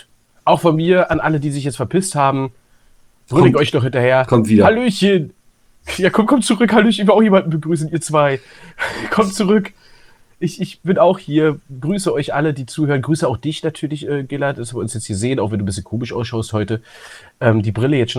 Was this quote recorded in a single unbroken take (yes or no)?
yes